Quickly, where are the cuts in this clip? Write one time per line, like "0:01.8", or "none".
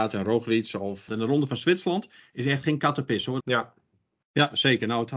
0:01.1
0:03.4